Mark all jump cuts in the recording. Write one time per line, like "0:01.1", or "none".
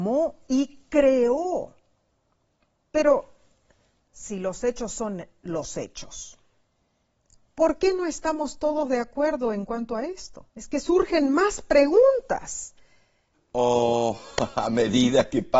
0:10.5
0:13.3